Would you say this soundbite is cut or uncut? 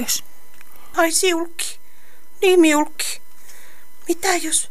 cut